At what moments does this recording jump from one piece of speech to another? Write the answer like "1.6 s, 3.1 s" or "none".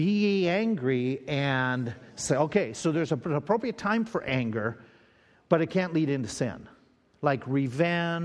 none